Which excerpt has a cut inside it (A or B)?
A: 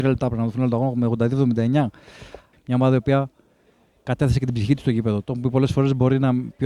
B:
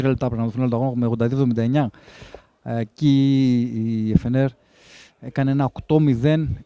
A